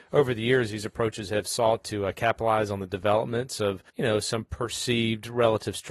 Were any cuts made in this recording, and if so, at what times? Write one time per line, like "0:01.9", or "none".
0:03.9